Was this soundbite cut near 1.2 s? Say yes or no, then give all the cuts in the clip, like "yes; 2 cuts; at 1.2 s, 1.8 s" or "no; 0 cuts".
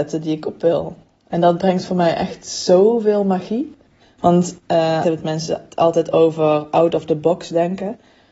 no; 2 cuts; at 4.0 s, 5.0 s